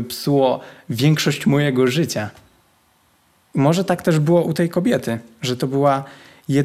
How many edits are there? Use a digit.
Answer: 0